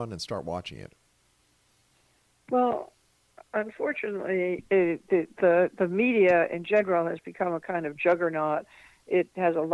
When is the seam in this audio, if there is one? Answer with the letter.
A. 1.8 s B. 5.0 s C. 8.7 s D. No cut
D